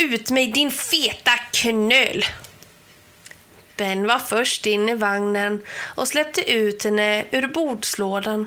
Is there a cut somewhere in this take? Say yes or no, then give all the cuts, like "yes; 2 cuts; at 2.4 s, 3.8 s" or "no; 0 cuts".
no; 0 cuts